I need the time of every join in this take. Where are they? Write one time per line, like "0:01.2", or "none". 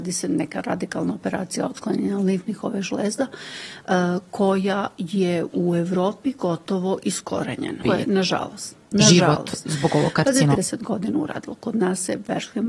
0:07.8
0:10.6